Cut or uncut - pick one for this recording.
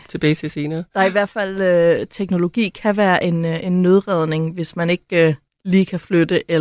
uncut